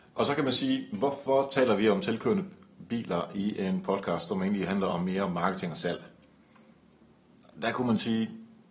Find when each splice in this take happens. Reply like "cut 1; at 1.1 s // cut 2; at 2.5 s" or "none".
none